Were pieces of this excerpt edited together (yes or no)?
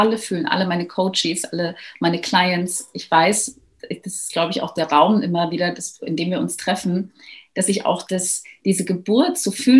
no